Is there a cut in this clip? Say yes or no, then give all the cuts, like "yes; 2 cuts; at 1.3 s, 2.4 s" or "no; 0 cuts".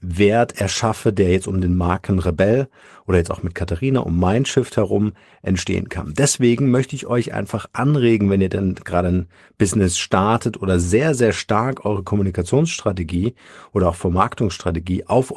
no; 0 cuts